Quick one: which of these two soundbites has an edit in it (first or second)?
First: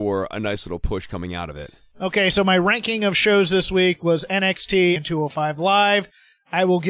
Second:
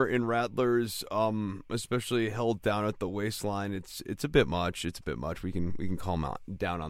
first